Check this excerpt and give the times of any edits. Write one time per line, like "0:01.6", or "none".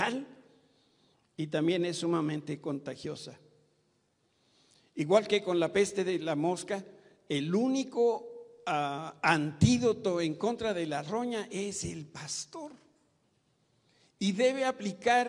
none